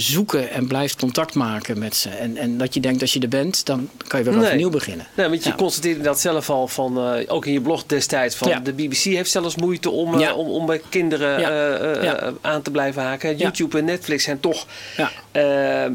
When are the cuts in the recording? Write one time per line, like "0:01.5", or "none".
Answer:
none